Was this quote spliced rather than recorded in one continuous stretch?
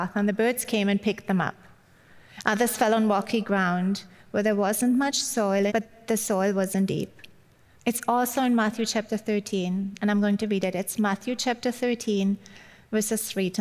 yes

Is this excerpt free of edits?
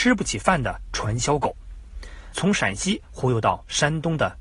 no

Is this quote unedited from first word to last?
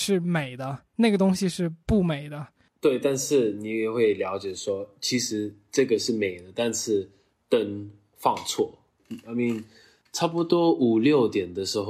yes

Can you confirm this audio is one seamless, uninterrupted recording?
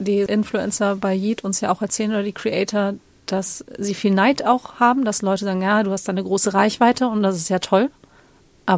yes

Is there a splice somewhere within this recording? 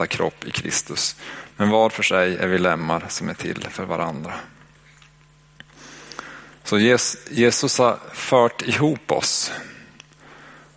no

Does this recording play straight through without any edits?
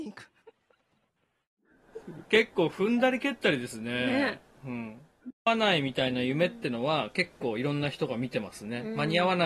no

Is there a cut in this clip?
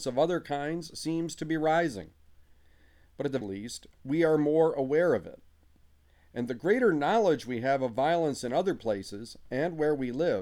yes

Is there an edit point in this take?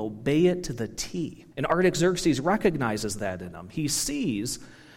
yes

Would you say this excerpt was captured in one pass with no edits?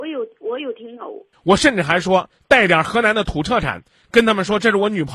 no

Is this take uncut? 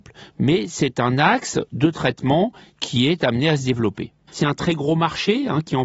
no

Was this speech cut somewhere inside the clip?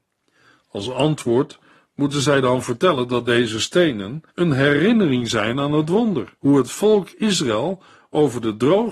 yes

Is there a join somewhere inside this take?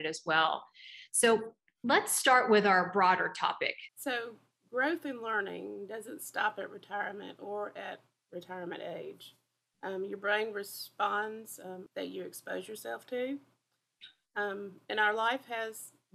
yes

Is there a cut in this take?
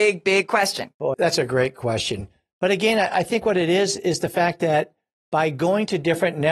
yes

